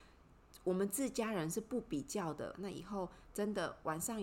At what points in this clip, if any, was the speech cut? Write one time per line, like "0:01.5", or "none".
0:02.5